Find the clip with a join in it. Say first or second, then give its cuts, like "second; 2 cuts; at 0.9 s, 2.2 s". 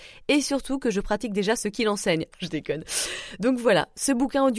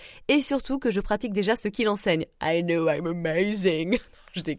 first; 1 cut; at 2.3 s